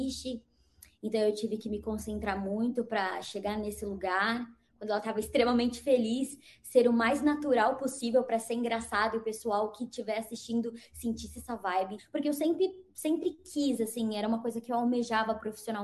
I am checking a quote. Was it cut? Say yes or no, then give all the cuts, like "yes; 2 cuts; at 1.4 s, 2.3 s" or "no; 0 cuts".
yes; 1 cut; at 12.0 s